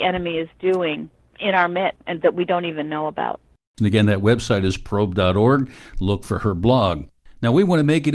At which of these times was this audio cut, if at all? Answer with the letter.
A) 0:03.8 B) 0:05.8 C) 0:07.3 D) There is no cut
A